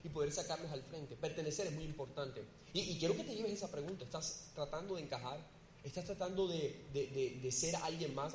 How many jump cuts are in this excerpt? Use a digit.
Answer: 0